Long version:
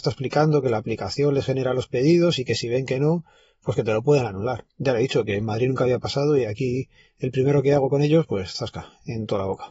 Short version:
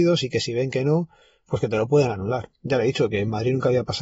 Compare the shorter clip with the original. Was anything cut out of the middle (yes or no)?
no